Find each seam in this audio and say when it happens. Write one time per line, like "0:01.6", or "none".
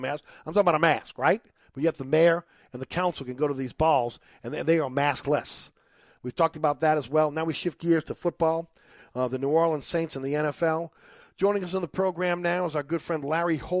none